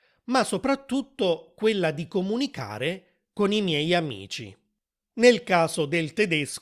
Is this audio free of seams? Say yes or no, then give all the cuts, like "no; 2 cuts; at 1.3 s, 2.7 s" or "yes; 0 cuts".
no; 1 cut; at 5.0 s